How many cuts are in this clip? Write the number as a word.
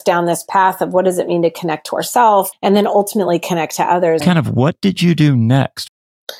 two